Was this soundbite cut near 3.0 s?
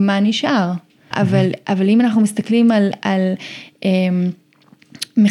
no; 1 cut; at 1.1 s

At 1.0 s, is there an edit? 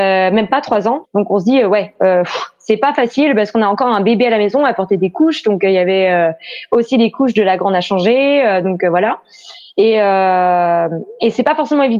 yes; 1 cut; at 1.0 s

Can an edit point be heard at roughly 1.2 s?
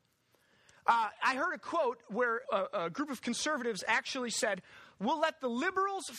no; 1 cut; at 2.4 s

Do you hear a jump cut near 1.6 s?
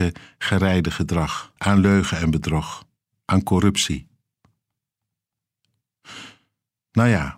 yes; 1 cut; at 1.6 s

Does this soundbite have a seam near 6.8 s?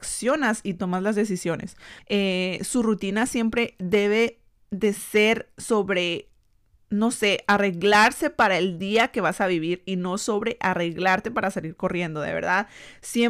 no; 1 cut; at 2.0 s

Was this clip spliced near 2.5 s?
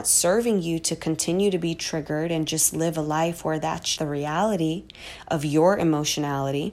no; 1 cut; at 4.0 s

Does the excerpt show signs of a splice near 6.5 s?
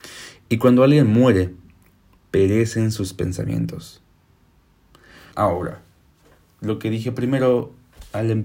no; 2 cuts; at 2.2 s, 5.3 s

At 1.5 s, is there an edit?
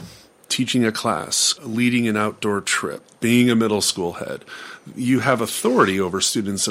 yes; 1 cut; at 1.5 s

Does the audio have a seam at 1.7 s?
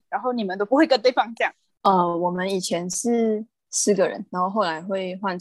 yes; 1 cut; at 1.7 s

